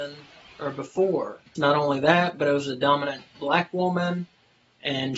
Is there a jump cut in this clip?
yes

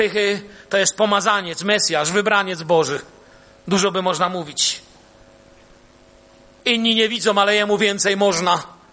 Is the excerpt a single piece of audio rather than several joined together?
yes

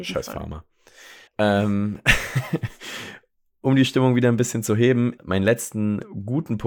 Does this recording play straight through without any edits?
no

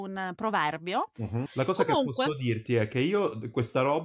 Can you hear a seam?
yes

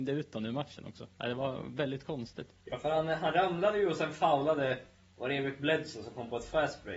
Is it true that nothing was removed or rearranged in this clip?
yes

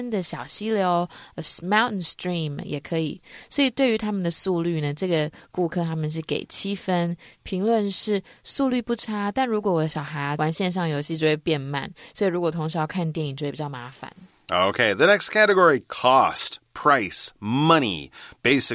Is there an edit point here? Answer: no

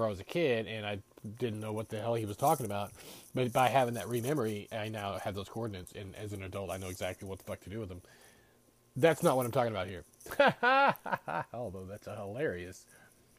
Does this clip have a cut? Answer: no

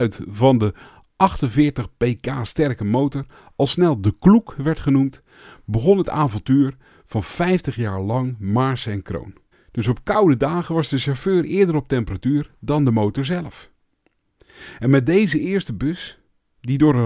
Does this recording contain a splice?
yes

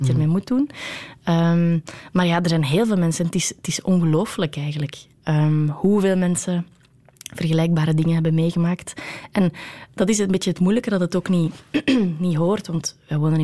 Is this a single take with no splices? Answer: yes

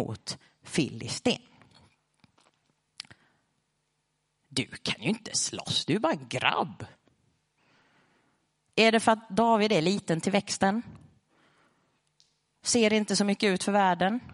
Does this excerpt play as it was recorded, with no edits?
yes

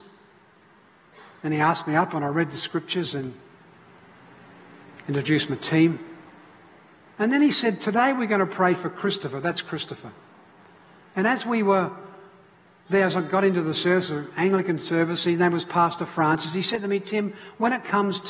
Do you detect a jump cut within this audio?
yes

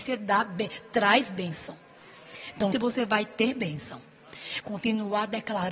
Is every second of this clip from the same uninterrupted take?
no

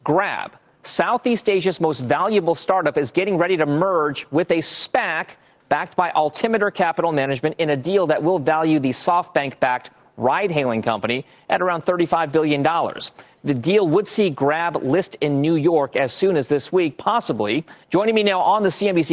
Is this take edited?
yes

